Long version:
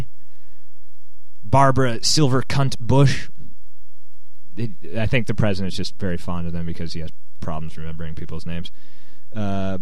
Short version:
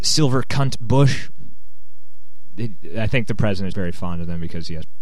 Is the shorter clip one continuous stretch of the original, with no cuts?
no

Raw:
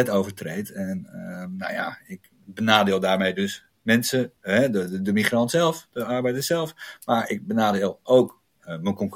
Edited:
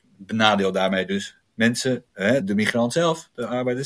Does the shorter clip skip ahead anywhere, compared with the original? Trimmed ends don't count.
yes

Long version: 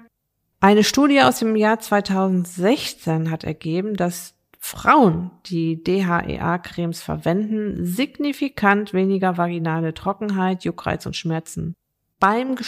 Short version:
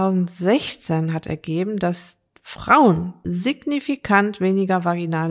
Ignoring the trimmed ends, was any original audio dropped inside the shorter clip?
yes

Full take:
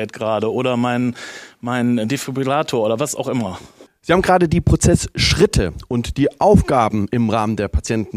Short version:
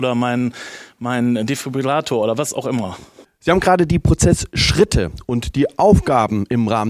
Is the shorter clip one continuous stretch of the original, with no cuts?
yes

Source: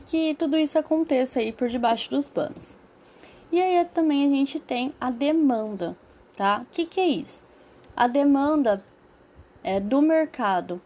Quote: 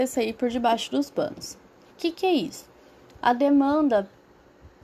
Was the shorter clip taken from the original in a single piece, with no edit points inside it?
no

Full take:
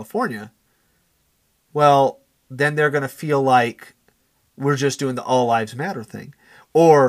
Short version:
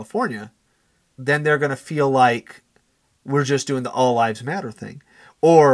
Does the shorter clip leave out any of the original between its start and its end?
yes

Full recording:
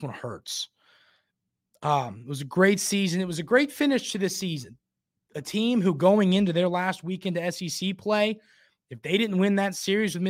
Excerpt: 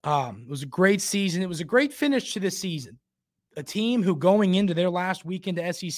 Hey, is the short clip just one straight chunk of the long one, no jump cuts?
yes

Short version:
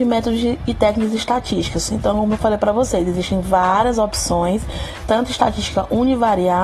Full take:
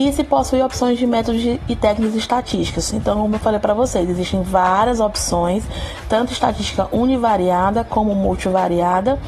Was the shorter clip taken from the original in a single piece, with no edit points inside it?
yes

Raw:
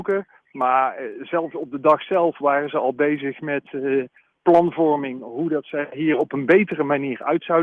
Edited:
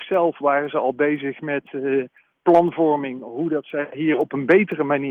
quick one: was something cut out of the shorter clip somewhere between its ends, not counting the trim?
no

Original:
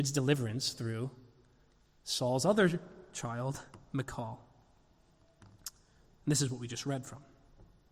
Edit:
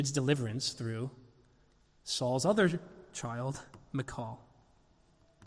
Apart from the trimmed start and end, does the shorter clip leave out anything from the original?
no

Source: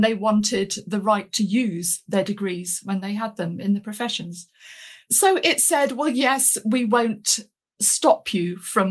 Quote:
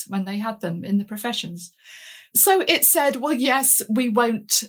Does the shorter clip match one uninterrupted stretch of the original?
yes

